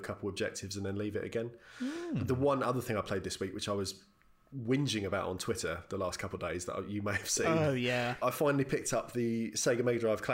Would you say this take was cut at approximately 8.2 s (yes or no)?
yes